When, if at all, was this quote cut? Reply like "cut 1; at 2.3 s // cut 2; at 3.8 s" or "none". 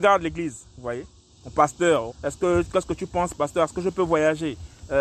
cut 1; at 2.1 s